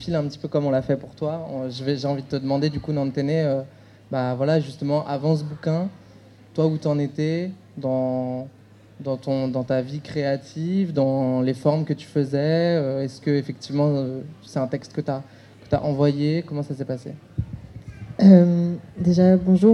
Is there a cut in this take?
no; 0 cuts

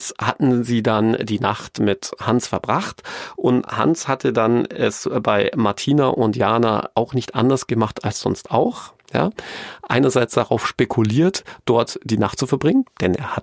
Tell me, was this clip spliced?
no; 0 cuts

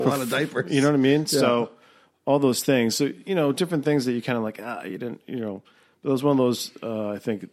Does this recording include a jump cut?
no; 0 cuts

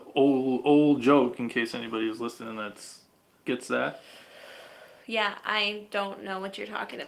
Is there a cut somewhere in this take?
no; 0 cuts

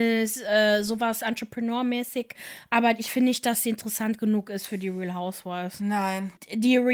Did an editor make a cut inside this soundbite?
no; 0 cuts

